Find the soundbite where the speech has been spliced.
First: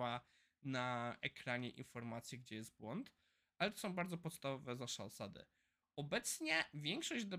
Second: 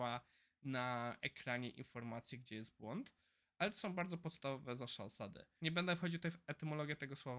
second; 1 cut; at 5.6 s

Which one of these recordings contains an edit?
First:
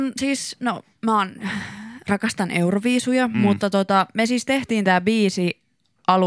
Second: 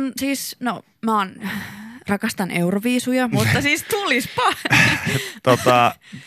second; 1 cut; at 3.3 s

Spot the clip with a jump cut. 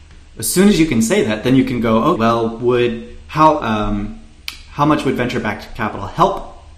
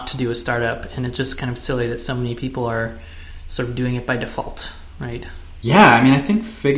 first; 2 cuts; at 2.2 s, 3.6 s

